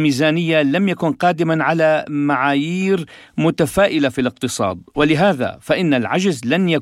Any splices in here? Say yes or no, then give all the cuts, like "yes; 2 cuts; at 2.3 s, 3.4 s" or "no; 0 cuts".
no; 0 cuts